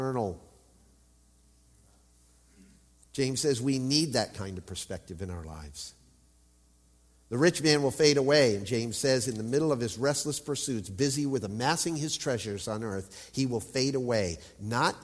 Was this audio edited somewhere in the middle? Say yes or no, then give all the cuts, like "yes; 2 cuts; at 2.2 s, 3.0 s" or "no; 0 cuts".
no; 0 cuts